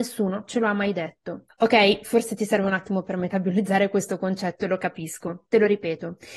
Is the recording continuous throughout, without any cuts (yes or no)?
yes